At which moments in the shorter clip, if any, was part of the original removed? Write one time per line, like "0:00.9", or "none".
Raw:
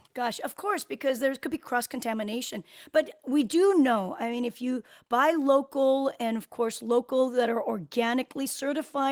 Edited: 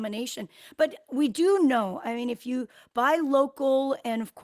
none